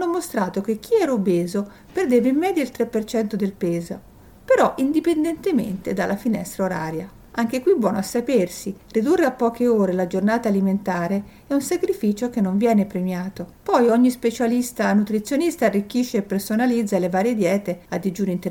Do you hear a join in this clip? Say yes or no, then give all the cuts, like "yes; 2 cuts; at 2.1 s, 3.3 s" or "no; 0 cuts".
yes; 1 cut; at 13.5 s